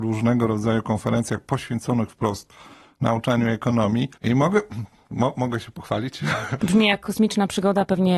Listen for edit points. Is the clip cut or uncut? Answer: cut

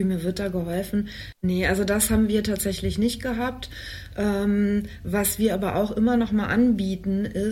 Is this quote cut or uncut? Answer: cut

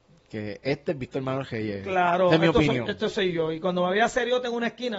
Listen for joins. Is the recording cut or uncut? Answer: uncut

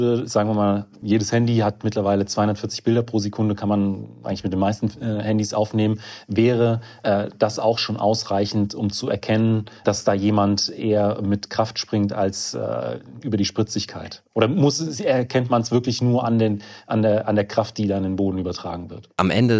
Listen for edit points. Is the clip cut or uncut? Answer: uncut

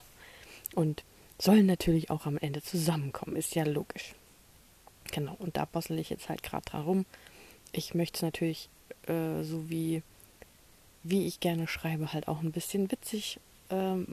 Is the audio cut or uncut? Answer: uncut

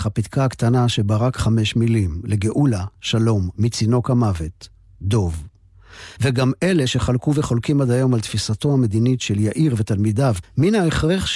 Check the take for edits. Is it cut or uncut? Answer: cut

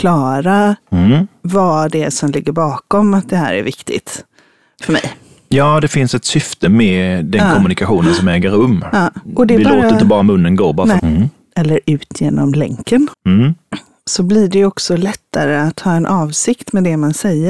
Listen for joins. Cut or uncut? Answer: cut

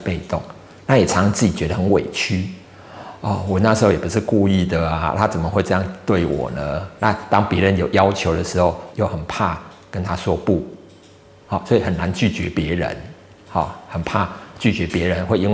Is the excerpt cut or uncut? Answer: cut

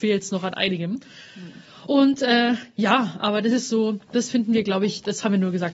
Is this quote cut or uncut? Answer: uncut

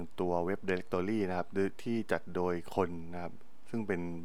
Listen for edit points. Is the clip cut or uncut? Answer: uncut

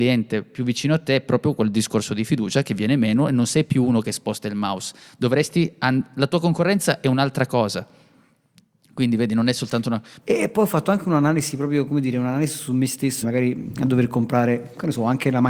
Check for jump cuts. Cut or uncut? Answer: cut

